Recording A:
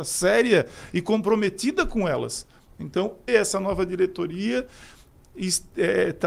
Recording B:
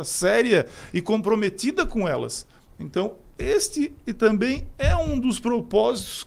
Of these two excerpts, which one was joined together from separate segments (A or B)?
A